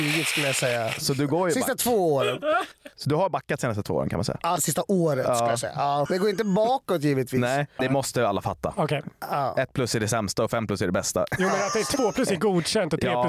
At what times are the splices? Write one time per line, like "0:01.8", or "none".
0:04.6
0:06.1
0:07.8